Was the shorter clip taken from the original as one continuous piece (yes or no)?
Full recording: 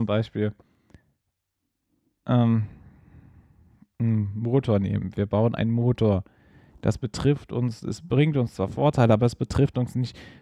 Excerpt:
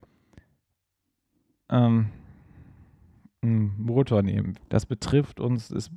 no